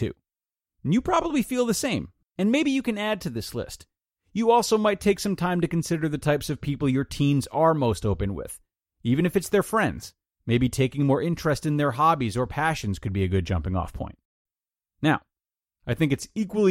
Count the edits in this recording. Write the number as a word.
one